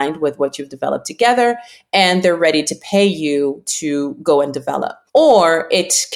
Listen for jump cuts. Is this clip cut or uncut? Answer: cut